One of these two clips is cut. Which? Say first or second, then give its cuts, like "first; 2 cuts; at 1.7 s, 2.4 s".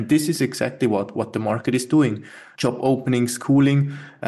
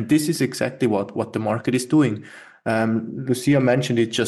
first; 1 cut; at 2.5 s